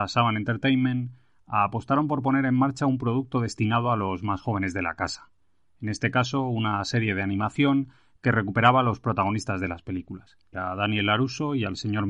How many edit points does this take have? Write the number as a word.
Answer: one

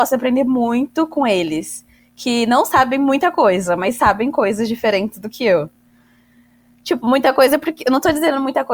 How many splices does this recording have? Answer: zero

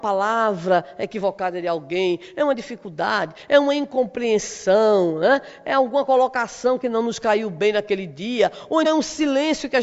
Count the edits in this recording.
one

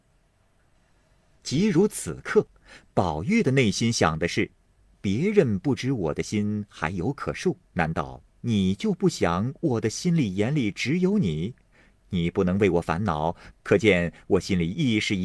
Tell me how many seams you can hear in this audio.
two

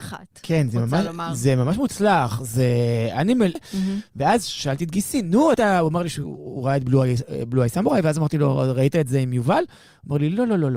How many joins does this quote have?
two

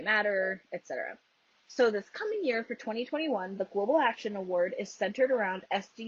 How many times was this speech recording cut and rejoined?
one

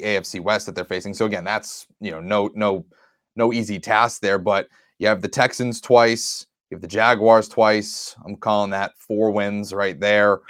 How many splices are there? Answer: zero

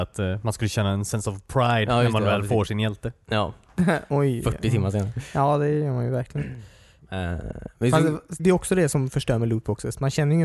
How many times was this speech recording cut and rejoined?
one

